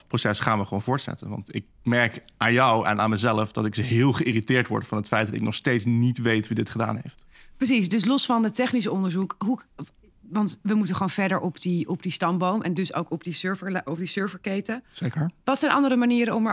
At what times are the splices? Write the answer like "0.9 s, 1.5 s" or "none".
none